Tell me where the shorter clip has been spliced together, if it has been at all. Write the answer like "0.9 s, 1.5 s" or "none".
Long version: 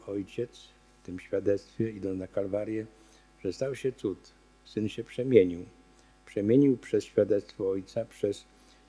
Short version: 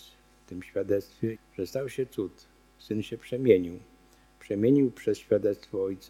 1.4 s